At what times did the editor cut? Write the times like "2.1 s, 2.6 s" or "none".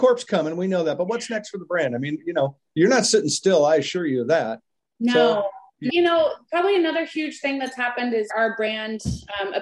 5.9 s, 8.3 s